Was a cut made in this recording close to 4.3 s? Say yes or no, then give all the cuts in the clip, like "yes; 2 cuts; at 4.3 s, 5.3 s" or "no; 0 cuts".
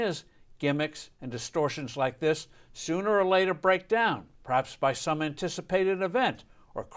yes; 2 cuts; at 1.2 s, 4.3 s